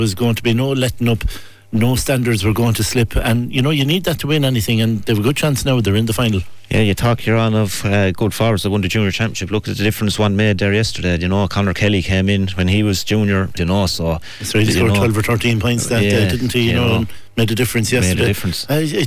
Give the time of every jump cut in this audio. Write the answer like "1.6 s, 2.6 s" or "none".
13.6 s